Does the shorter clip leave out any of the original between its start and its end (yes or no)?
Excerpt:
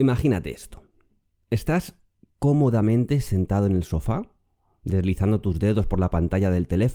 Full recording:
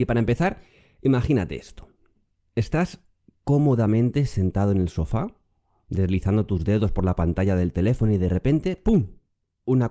no